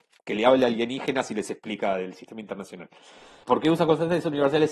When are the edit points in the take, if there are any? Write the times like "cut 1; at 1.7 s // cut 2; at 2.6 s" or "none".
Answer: cut 1; at 3.4 s